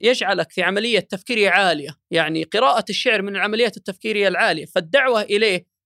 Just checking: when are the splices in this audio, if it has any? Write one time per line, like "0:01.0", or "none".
0:02.0

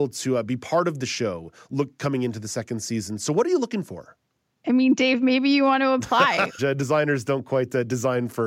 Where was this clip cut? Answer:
0:06.6

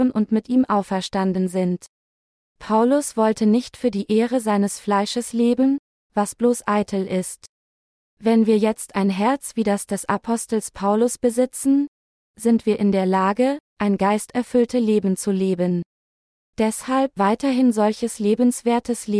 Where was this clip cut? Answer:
0:02.5
0:17.2

